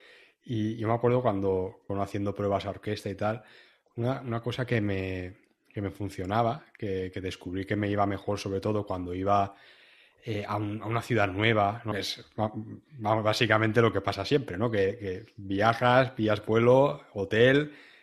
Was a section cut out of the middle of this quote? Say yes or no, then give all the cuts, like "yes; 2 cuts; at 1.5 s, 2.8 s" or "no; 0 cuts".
yes; 2 cuts; at 1.9 s, 11.9 s